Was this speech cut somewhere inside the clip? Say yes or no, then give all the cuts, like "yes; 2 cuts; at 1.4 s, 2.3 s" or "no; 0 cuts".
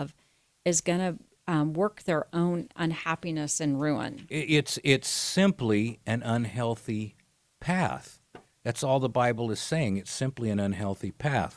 no; 0 cuts